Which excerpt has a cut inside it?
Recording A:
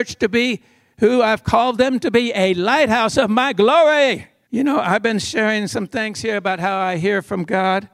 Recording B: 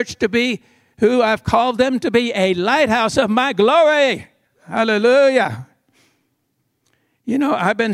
A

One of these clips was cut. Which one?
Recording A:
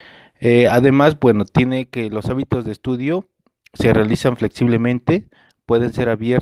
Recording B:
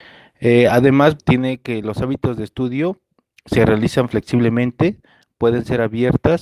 B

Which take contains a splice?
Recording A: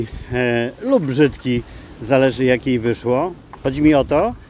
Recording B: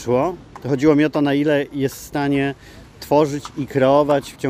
A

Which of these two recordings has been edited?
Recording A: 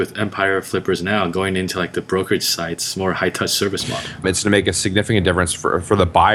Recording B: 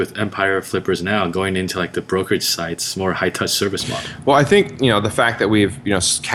A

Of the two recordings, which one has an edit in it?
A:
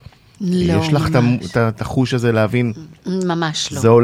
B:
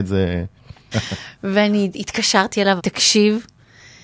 B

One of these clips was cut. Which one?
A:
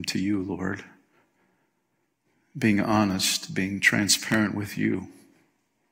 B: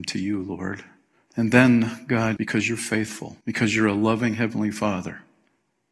B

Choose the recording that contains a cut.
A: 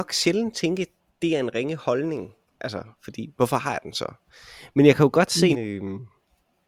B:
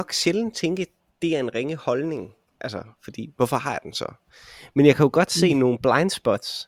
A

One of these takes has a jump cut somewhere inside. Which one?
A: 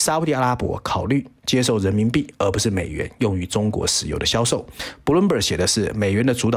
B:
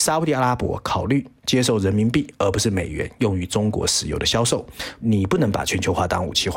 B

